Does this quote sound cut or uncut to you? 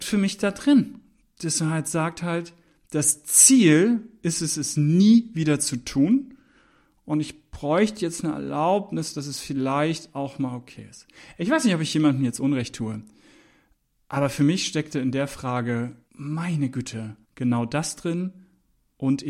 cut